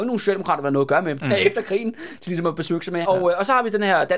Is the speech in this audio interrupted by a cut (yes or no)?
yes